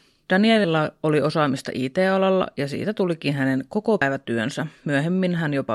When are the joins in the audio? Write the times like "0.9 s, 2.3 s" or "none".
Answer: none